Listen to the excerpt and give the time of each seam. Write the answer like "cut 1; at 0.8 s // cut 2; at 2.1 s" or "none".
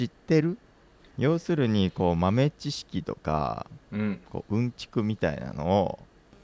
cut 1; at 1.0 s

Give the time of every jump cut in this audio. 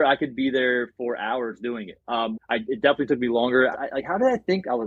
cut 1; at 2.3 s // cut 2; at 3.7 s

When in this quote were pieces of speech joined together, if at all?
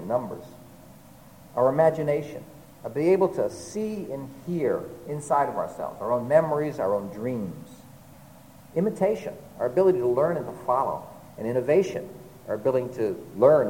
none

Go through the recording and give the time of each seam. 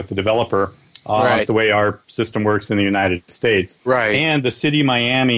cut 1; at 1.4 s // cut 2; at 3.8 s

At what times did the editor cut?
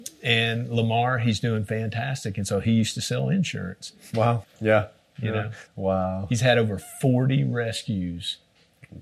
cut 1; at 4.4 s // cut 2; at 5.7 s

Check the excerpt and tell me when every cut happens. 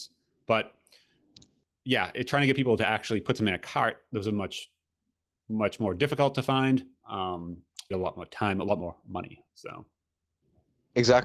cut 1; at 7.9 s

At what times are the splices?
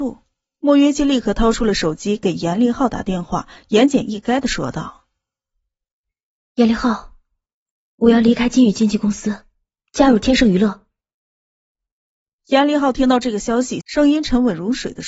cut 1; at 13.8 s

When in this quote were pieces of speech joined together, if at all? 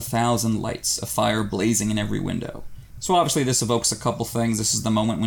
cut 1; at 2.9 s

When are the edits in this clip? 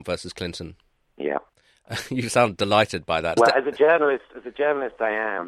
cut 1; at 3.4 s

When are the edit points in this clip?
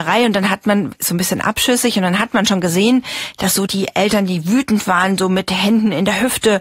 none

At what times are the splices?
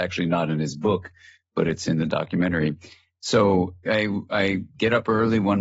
cut 1; at 3.8 s

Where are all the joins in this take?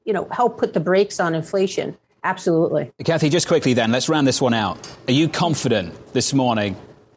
none

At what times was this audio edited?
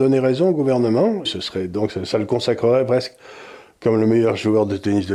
cut 1; at 1.3 s

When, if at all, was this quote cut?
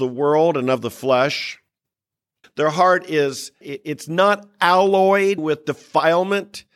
cut 1; at 2.4 s // cut 2; at 3.6 s // cut 3; at 5.4 s

